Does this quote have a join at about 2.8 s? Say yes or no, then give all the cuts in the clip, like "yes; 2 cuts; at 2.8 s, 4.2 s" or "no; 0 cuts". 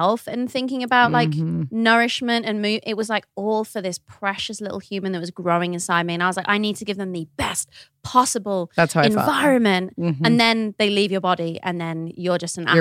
no; 0 cuts